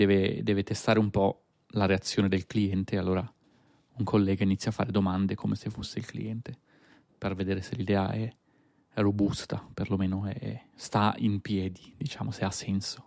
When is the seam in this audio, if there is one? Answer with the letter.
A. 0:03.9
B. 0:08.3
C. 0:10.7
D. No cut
D